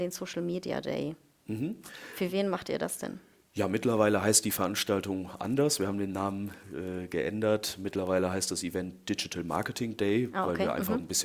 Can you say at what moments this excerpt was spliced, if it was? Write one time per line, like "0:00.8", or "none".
none